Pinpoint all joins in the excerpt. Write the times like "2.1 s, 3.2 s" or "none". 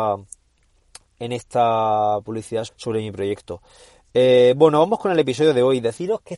2.7 s